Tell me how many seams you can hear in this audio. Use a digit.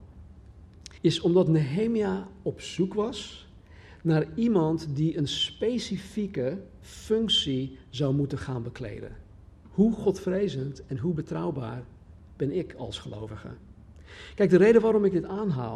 2